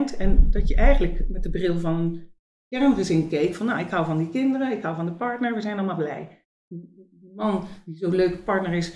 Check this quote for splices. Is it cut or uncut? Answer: cut